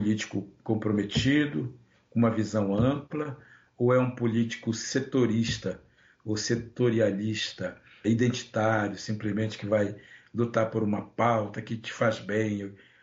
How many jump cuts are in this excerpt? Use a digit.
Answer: 1